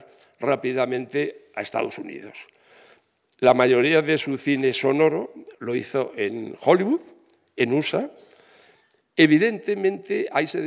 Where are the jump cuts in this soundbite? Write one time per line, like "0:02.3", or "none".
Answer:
none